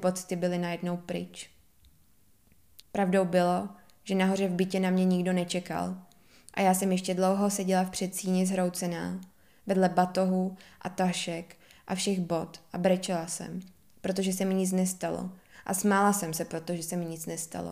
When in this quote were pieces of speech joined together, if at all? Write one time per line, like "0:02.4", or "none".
0:02.8